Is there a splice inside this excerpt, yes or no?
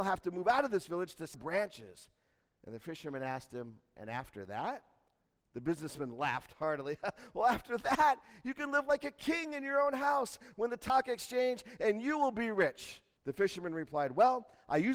yes